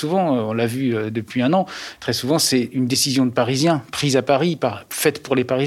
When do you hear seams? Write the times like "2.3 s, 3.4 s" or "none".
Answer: none

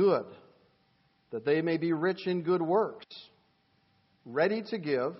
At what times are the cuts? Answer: none

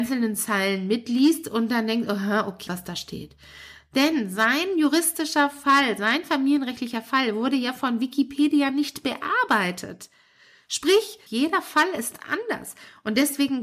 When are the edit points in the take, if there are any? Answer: 2.7 s, 11.3 s

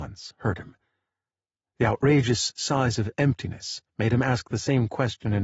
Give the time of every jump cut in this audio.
none

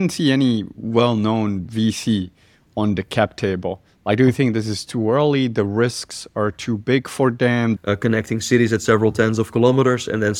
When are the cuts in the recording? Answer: 7.8 s

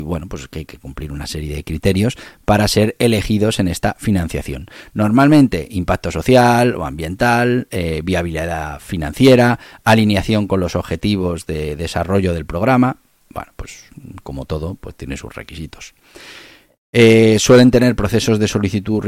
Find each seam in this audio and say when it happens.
none

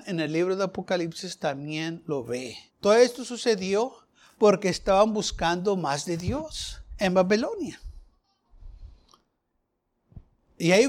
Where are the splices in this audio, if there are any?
2.7 s

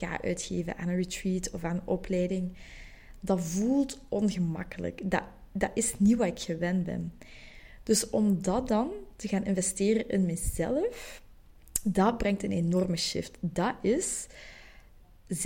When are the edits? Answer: none

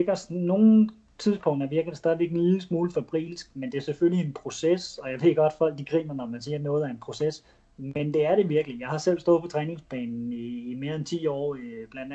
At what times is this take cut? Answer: none

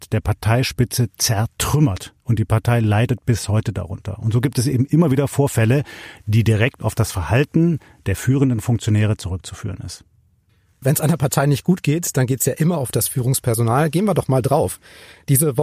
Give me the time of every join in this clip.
none

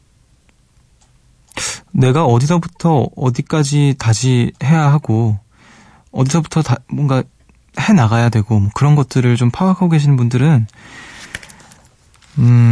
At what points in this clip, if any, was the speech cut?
none

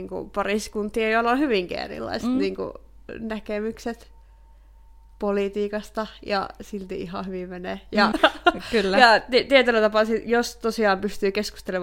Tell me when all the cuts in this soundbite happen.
8.1 s

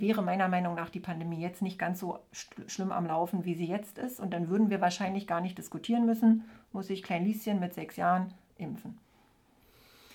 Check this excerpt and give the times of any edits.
none

